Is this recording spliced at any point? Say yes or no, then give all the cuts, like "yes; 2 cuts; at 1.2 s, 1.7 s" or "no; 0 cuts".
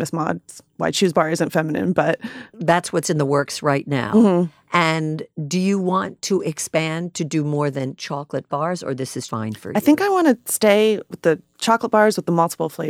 yes; 1 cut; at 9.3 s